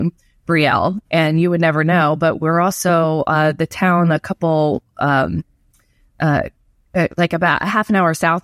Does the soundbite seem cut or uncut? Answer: cut